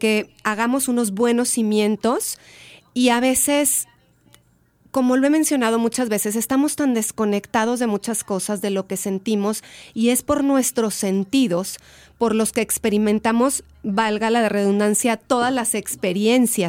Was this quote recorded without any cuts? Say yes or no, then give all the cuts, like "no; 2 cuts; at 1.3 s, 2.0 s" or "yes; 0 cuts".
yes; 0 cuts